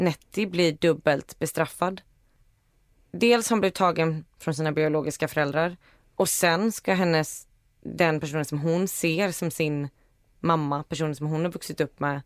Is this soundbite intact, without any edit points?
yes; 0 cuts

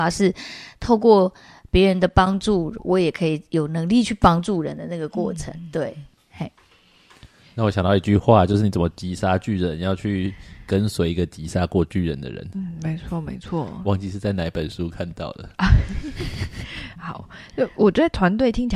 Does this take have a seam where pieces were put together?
no; 0 cuts

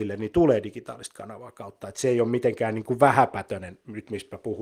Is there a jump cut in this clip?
no; 0 cuts

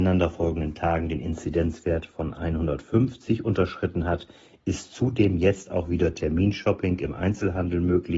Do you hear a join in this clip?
no; 0 cuts

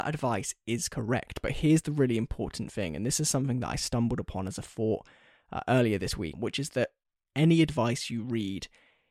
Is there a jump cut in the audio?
yes; 1 cut; at 6.3 s

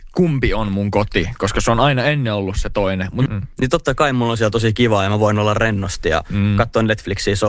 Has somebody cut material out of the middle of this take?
yes; 1 cut; at 3.3 s

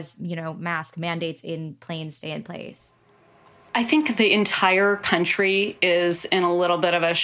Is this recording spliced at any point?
no; 0 cuts

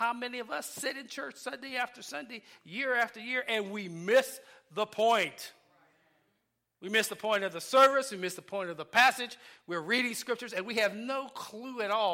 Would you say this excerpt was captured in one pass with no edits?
yes; 0 cuts

